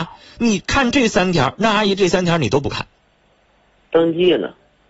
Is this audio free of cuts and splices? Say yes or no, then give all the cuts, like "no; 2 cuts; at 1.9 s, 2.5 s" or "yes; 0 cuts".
no; 1 cut; at 3.7 s